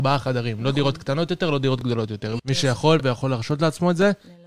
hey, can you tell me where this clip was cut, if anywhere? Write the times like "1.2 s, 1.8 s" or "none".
2.4 s